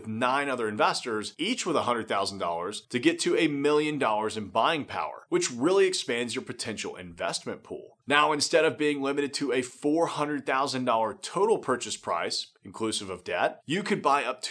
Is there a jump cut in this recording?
no; 0 cuts

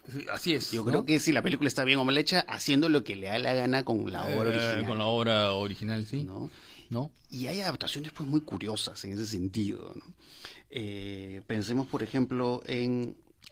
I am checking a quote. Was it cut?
no; 0 cuts

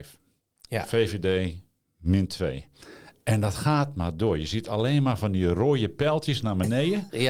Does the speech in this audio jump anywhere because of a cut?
no; 0 cuts

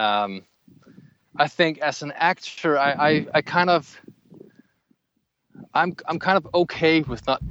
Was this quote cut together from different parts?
no; 0 cuts

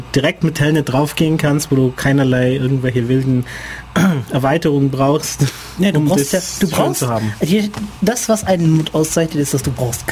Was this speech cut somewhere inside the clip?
no; 0 cuts

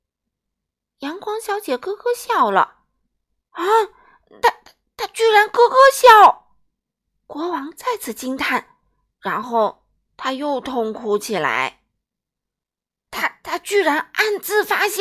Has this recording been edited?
yes; 1 cut; at 13.1 s

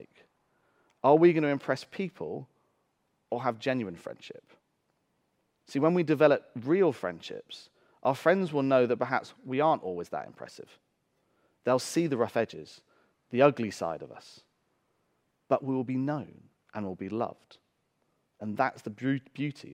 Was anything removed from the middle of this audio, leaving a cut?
no; 0 cuts

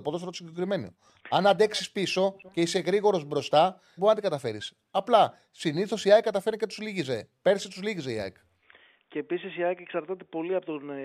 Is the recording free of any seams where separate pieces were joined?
no; 1 cut; at 4.0 s

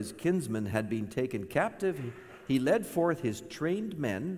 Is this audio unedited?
yes; 0 cuts

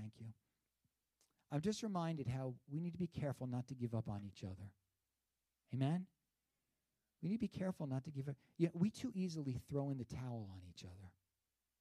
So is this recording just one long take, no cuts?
yes; 0 cuts

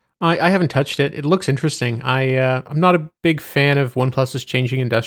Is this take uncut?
yes; 0 cuts

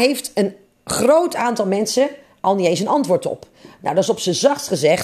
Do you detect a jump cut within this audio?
no; 0 cuts

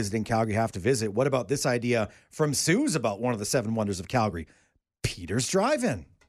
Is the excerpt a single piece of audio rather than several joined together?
yes; 0 cuts

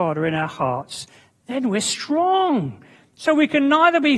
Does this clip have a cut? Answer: no; 0 cuts

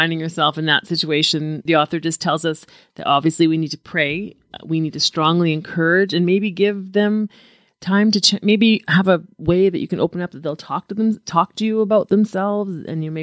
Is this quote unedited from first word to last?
no; 1 cut; at 1.7 s

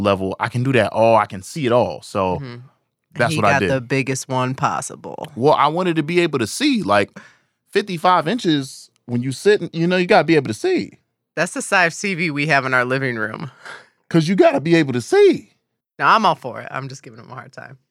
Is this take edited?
yes; 1 cut; at 15.8 s

